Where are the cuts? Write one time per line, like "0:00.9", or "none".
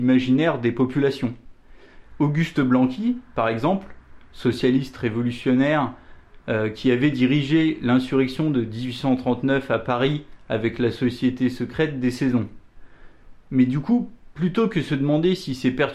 0:02.0